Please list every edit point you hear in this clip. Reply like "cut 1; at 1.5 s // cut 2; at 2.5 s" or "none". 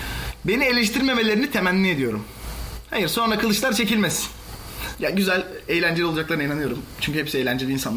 cut 1; at 4.9 s